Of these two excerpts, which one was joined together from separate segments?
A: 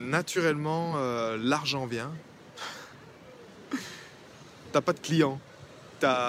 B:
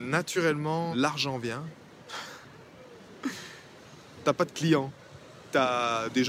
B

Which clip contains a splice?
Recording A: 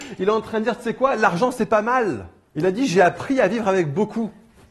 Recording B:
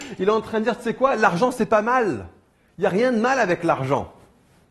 A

